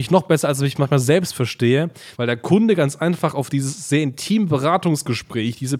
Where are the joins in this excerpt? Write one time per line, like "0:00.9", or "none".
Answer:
0:02.1